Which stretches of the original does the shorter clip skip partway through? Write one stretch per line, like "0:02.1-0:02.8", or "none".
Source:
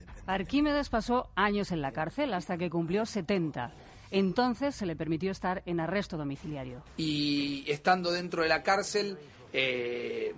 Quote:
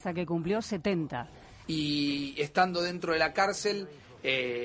0:04.1-0:06.9